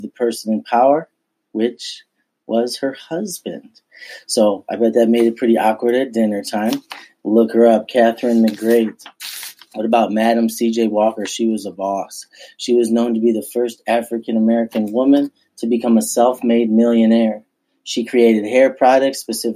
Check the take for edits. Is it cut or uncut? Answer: uncut